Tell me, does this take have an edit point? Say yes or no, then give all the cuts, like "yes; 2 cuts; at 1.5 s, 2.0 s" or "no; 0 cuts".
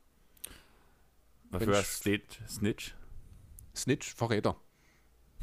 no; 0 cuts